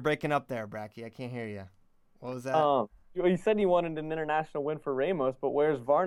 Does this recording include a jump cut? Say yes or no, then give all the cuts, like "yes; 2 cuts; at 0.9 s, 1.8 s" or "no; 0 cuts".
no; 0 cuts